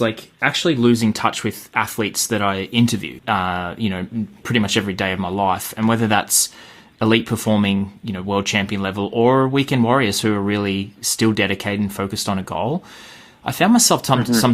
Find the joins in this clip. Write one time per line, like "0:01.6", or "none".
0:03.2